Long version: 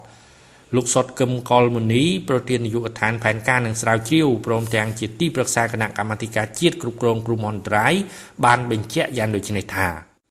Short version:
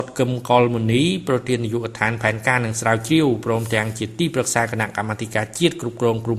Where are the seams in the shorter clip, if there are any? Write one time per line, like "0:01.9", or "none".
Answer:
none